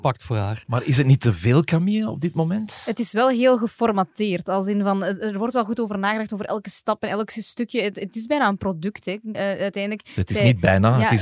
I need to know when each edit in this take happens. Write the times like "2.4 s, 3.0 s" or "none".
9.3 s